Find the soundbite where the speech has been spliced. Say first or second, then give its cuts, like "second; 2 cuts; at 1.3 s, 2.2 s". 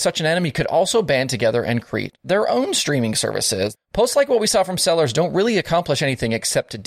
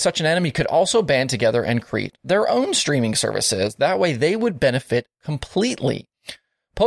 first; 1 cut; at 3.8 s